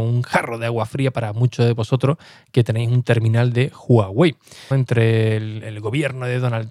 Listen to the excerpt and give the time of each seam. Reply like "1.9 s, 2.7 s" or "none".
4.7 s